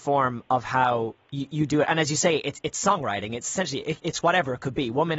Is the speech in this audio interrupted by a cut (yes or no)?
no